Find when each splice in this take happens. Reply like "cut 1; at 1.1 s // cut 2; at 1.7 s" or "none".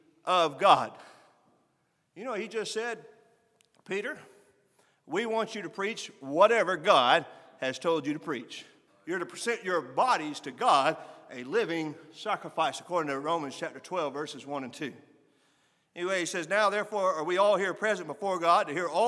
cut 1; at 8.9 s